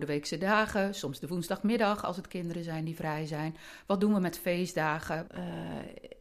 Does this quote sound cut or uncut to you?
cut